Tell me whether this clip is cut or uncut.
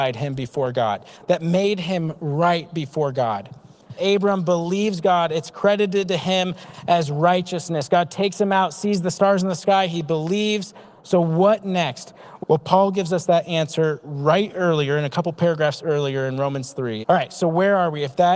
cut